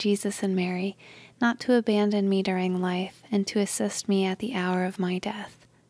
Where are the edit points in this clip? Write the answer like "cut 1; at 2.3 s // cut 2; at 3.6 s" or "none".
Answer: none